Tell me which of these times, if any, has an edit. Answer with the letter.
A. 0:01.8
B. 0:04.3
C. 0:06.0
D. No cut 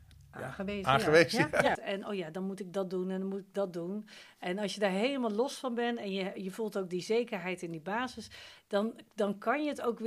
A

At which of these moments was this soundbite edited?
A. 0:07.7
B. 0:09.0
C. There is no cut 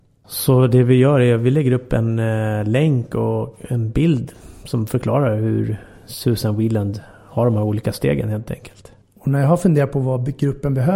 B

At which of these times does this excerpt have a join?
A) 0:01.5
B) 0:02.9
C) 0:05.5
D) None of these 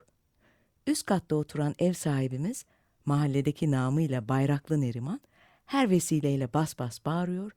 D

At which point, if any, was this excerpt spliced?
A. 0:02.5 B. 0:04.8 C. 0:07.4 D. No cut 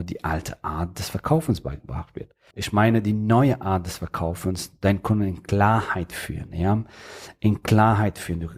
A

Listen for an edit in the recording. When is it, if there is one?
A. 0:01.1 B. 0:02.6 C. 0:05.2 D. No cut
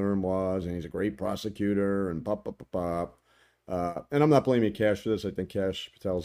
B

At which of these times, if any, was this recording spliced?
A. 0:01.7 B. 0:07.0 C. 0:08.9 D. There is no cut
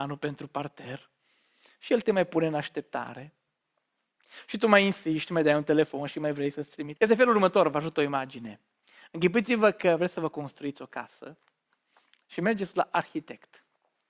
B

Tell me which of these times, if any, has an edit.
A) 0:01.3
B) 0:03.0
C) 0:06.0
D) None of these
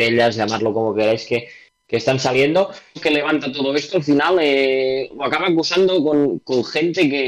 B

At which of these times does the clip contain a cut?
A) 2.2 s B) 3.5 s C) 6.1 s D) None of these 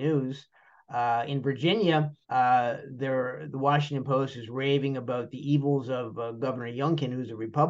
A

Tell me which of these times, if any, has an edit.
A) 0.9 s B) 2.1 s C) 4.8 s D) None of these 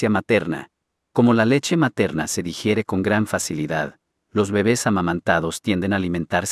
A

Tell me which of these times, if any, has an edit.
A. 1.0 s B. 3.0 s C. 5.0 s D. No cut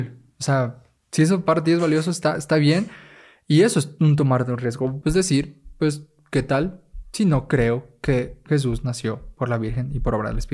C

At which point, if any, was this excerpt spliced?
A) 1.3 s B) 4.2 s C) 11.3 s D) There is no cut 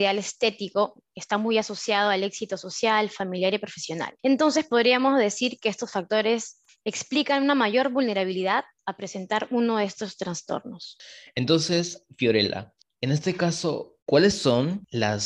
B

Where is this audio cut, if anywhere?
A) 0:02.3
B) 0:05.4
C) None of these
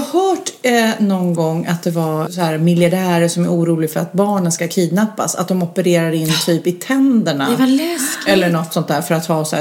A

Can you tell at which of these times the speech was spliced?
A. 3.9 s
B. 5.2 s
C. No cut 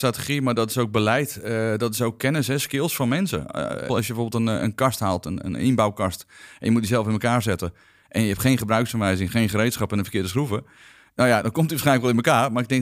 A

